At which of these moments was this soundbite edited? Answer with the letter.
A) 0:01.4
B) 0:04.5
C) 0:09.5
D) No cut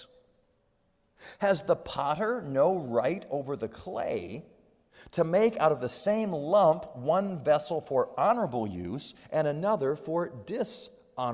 D